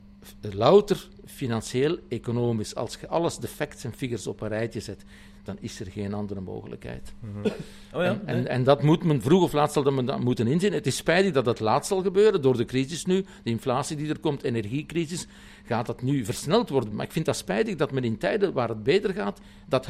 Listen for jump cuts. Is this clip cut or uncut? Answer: uncut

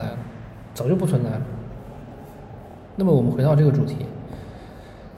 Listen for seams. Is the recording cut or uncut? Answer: uncut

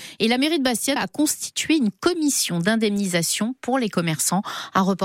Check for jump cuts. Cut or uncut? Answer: cut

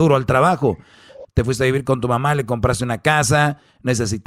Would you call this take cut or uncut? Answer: cut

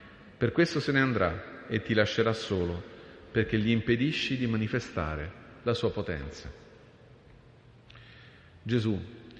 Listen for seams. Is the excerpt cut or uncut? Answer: uncut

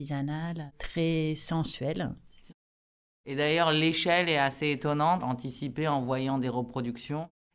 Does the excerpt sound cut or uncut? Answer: cut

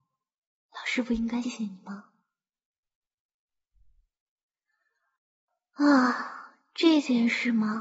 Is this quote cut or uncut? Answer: cut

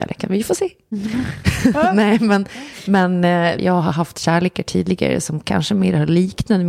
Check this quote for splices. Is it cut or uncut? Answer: cut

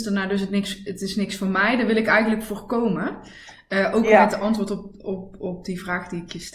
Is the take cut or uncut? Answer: uncut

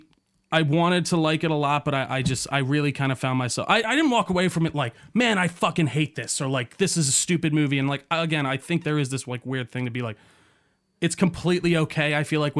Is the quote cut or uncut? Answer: uncut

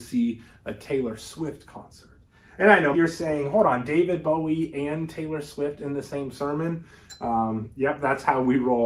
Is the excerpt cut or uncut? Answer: cut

